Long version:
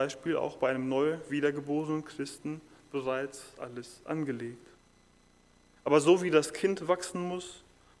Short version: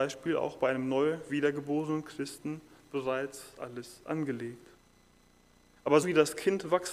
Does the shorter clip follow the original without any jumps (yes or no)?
no